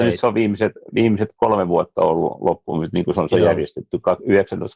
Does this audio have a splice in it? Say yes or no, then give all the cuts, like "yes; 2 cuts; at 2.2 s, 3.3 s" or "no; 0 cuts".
no; 0 cuts